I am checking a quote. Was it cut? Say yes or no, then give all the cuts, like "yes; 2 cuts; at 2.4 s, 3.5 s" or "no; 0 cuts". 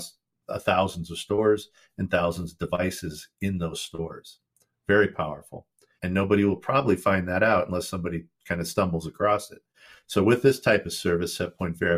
yes; 1 cut; at 6.0 s